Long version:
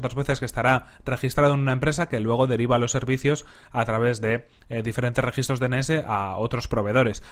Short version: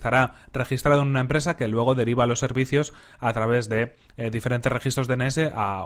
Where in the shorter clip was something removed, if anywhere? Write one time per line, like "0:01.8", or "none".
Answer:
none

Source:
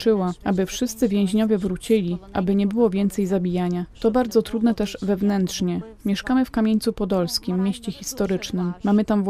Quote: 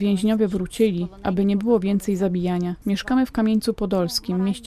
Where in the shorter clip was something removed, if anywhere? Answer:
0:02.8

